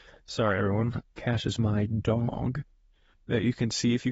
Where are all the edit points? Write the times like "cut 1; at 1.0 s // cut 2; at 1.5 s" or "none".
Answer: cut 1; at 1.0 s